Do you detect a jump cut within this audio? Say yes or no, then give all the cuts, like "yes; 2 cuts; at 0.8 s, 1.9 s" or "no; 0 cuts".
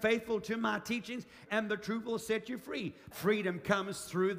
yes; 2 cuts; at 1.5 s, 3.1 s